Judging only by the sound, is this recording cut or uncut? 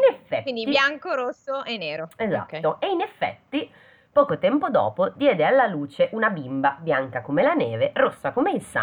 uncut